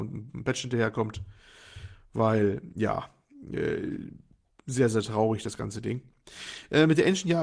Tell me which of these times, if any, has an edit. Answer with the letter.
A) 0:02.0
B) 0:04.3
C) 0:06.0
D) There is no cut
D